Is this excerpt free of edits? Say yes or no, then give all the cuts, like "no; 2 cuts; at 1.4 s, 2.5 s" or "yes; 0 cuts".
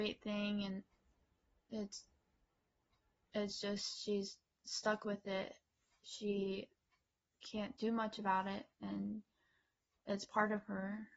yes; 0 cuts